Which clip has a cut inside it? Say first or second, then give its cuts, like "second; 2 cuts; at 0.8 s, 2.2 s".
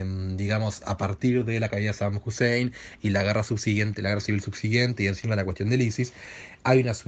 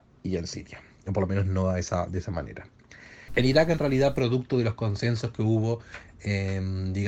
second; 1 cut; at 3.3 s